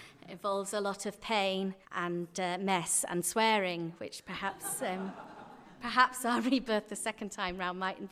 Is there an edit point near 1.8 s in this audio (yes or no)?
yes